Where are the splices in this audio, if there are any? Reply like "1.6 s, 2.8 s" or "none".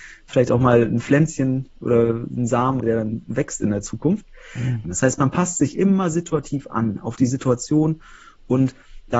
2.8 s, 4.8 s